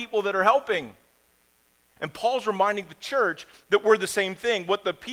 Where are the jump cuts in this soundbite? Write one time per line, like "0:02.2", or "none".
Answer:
0:02.0